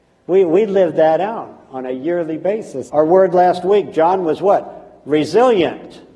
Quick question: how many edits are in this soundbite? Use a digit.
1